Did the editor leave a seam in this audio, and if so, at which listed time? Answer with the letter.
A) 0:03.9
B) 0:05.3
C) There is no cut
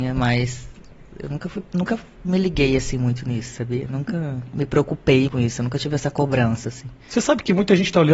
B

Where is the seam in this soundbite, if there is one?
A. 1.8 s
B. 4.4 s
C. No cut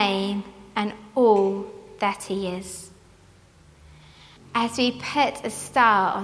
B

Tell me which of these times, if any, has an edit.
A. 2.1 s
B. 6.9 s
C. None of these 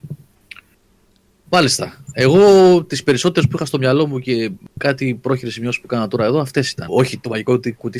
B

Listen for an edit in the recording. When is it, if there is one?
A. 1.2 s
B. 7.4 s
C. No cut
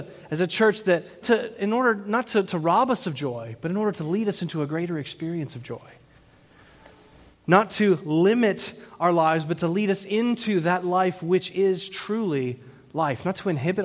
A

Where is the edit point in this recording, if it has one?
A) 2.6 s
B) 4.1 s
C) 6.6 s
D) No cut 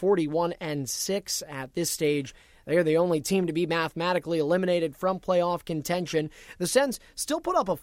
D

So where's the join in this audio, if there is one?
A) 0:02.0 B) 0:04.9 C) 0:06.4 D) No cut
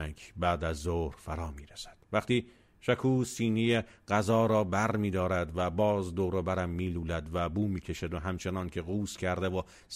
A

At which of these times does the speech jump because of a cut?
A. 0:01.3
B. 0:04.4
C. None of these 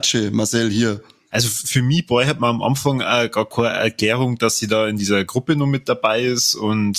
A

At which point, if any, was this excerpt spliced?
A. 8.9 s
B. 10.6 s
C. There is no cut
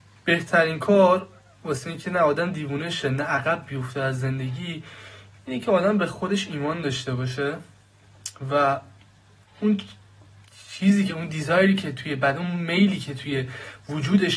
C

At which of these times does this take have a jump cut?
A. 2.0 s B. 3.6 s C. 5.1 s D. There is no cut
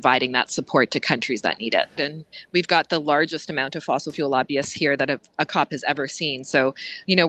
A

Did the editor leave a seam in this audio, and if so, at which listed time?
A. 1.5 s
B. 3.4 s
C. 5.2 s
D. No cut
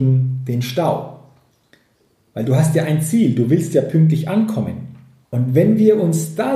C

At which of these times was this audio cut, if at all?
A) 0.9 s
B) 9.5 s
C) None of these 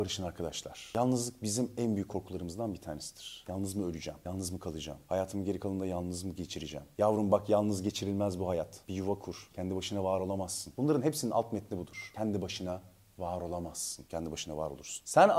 B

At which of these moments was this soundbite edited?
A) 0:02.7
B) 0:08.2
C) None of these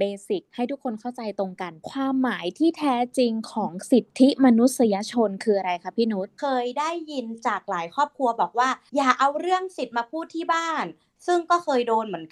C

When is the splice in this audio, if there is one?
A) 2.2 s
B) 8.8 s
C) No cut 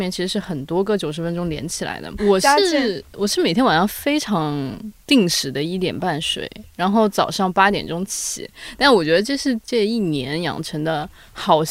A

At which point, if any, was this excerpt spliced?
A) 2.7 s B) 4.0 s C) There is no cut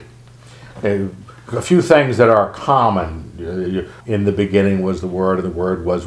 B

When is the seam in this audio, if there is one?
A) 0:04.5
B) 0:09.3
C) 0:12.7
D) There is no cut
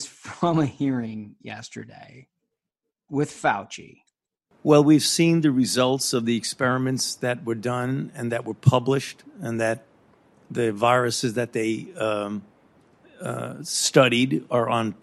A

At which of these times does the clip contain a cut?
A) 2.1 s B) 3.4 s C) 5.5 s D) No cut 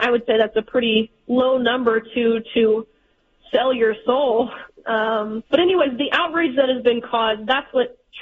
C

